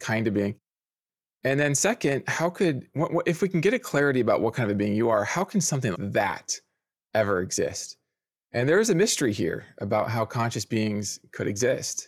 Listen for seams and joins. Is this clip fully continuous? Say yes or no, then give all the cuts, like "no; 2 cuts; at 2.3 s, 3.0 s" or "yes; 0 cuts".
no; 1 cut; at 5.9 s